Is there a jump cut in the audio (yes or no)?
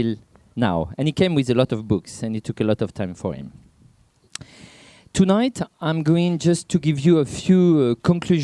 no